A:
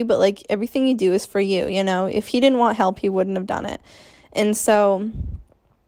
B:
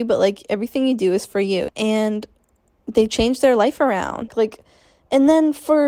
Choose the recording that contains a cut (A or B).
B